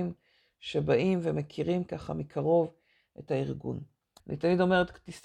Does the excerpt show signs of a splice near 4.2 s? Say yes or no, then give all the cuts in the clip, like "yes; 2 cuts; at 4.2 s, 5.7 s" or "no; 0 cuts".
yes; 1 cut; at 4.2 s